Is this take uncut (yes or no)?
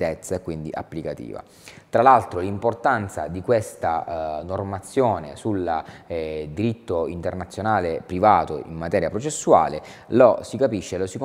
yes